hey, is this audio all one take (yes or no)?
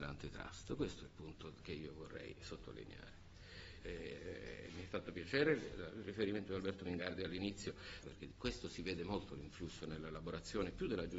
no